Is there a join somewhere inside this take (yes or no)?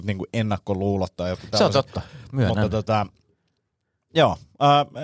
no